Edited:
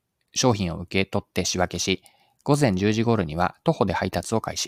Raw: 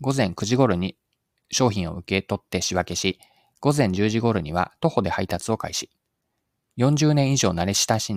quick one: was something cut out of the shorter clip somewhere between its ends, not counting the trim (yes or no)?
no